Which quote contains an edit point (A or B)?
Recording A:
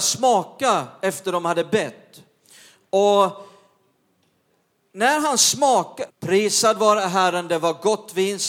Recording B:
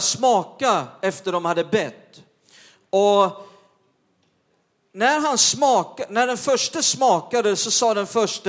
A